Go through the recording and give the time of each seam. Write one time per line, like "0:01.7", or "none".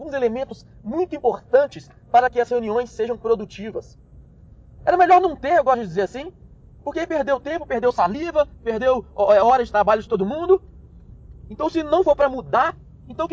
0:04.8